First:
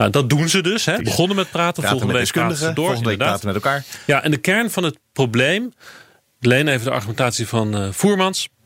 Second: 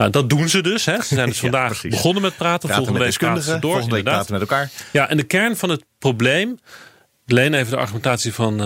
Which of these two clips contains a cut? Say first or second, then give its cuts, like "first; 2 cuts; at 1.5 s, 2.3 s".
first; 1 cut; at 1.0 s